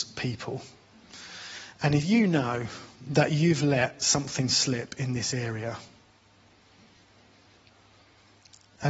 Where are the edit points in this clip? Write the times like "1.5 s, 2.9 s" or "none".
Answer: none